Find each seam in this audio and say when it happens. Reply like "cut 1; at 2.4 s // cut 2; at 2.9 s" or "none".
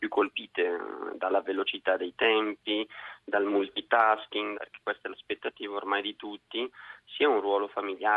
cut 1; at 4.5 s